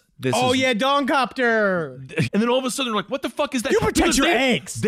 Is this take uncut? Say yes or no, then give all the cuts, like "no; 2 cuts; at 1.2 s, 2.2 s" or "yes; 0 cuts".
no; 1 cut; at 2.3 s